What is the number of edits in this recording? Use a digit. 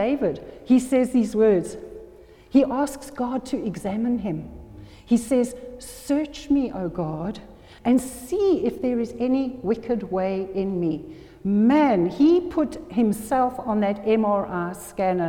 1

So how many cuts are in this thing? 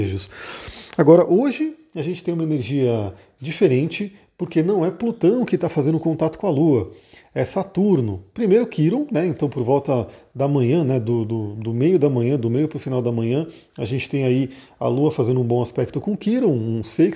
0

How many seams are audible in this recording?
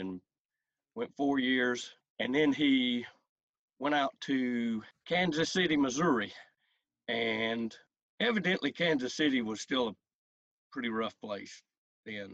0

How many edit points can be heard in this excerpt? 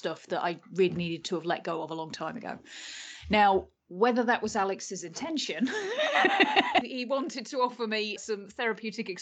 2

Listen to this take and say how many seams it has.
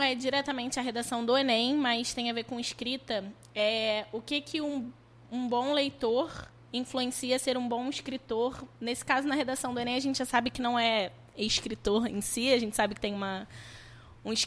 0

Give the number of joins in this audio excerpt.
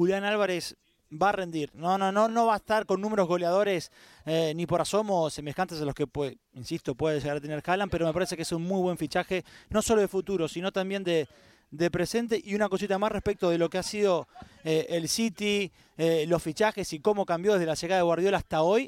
0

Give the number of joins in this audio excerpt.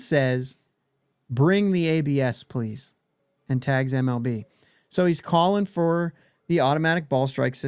0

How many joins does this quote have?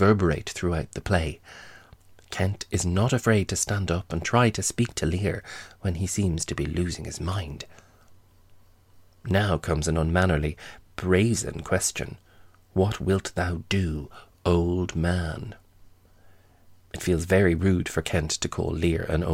0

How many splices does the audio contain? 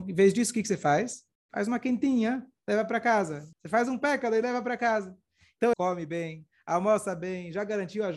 2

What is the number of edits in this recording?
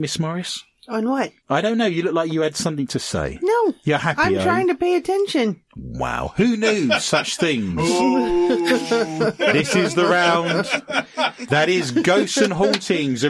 1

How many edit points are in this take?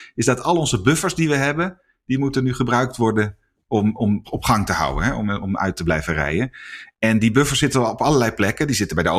1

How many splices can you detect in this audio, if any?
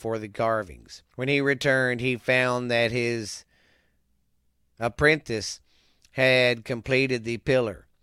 1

